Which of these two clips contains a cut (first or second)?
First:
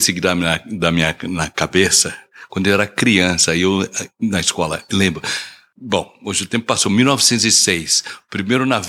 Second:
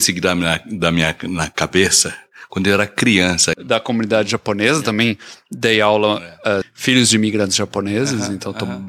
second